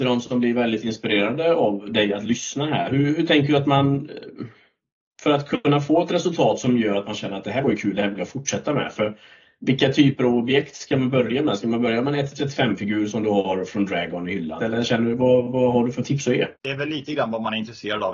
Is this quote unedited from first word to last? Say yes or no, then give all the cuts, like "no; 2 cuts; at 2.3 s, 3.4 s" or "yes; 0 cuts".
no; 2 cuts; at 14.6 s, 16.5 s